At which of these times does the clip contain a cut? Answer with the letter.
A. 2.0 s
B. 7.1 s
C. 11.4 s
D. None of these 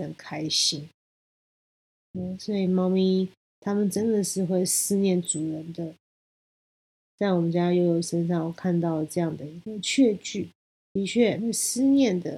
C